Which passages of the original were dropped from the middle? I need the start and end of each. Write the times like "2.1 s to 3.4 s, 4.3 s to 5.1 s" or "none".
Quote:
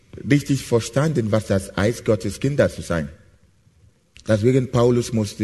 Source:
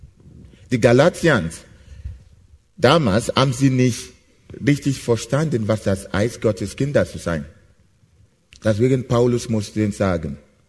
none